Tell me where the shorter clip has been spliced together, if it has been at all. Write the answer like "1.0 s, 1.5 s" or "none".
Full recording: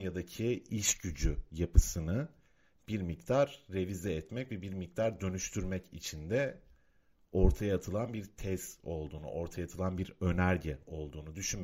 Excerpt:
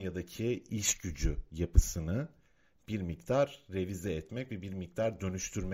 none